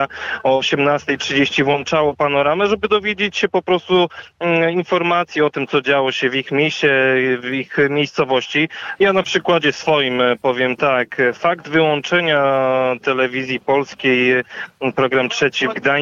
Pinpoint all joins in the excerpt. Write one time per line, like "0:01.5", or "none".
0:09.0